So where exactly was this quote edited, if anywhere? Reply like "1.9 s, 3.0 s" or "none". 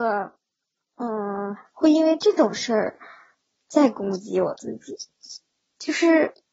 1.7 s